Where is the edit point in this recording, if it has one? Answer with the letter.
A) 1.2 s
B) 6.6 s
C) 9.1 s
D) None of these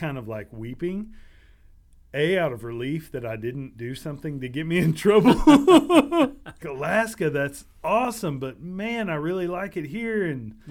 B